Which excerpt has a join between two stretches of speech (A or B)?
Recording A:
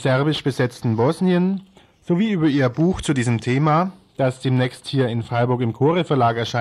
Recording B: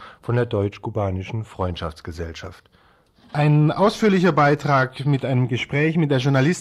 B